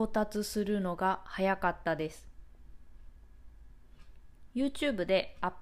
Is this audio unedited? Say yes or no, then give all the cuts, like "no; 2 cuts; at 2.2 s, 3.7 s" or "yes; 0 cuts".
no; 1 cut; at 4.5 s